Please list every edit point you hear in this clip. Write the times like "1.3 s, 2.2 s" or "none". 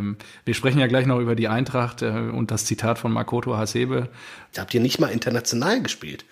4.5 s